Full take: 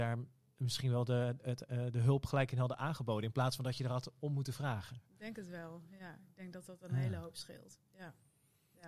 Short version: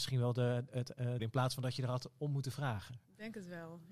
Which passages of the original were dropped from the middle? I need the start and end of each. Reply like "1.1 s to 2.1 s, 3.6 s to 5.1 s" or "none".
1.9 s to 3.2 s